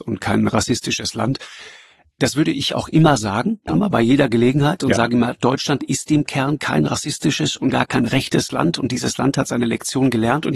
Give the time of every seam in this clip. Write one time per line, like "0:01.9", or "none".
0:03.7
0:07.7